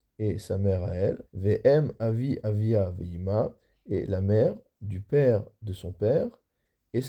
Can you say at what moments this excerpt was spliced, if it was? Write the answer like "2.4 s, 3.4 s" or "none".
1.2 s